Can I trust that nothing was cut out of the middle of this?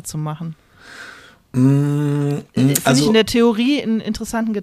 no; 1 cut; at 2.5 s

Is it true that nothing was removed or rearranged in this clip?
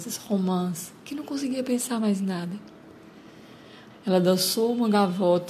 no; 1 cut; at 3.9 s

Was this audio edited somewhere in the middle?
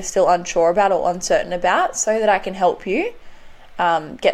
no; 0 cuts

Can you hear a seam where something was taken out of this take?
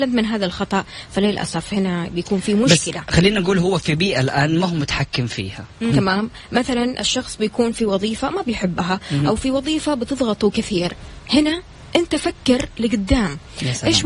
yes; 1 cut; at 5.9 s

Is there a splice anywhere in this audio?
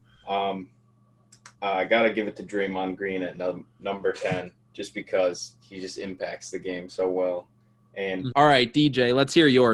yes; 1 cut; at 8.3 s

